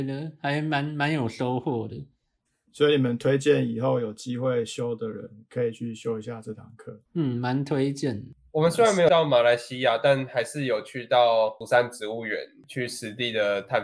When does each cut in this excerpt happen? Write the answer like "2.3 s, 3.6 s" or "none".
none